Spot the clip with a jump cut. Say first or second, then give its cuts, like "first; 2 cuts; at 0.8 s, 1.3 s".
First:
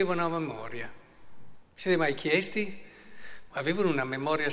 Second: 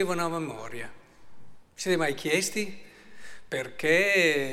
first; 1 cut; at 3.5 s